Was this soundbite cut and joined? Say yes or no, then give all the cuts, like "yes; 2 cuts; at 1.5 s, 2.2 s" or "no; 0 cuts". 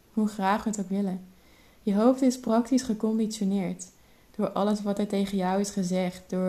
no; 0 cuts